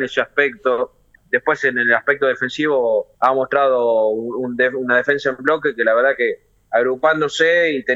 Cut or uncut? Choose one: cut